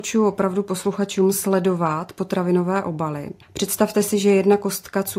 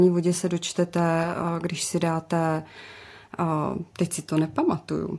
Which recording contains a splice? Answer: first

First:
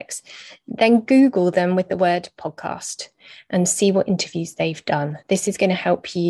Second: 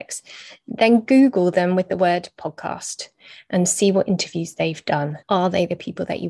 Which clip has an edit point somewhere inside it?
second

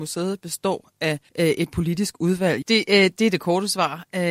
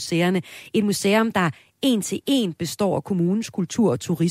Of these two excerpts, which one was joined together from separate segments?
first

